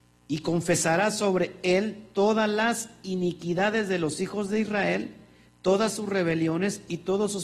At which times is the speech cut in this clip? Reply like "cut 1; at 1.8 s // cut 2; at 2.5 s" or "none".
none

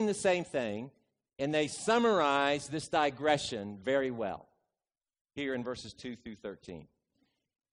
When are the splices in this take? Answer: none

